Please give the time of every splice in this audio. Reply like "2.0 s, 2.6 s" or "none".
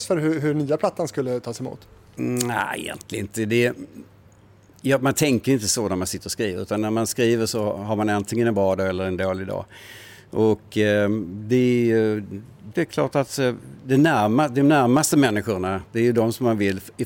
12.7 s